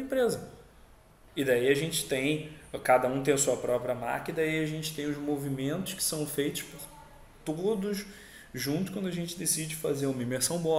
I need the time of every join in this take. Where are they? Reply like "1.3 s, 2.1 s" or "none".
1.3 s